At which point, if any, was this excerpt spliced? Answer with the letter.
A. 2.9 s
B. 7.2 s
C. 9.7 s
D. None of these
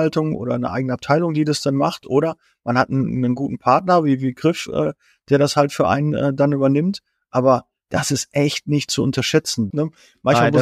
C